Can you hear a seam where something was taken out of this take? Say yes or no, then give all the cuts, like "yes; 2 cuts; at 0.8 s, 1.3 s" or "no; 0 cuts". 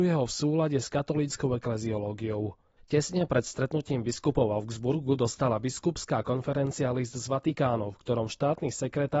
yes; 1 cut; at 2.8 s